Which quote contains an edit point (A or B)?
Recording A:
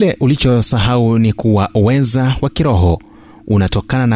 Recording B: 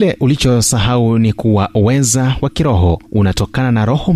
B